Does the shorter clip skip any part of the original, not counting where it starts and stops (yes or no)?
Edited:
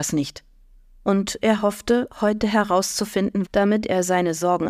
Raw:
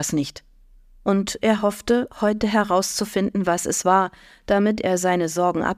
yes